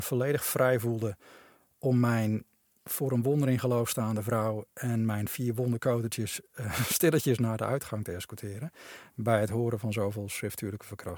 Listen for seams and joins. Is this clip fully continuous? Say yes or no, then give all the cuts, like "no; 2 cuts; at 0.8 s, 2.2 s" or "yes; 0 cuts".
yes; 0 cuts